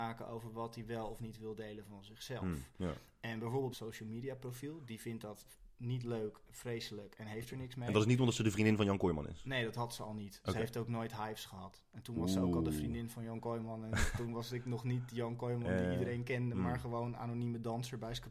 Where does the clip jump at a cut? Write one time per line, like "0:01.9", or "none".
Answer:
0:03.7